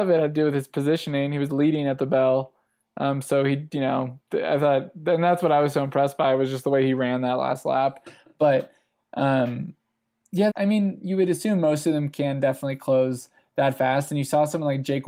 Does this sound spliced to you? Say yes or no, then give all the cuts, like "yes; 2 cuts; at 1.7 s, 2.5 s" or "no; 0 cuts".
yes; 1 cut; at 10.5 s